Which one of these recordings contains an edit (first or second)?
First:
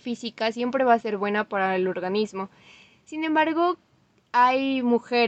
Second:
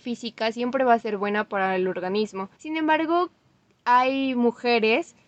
second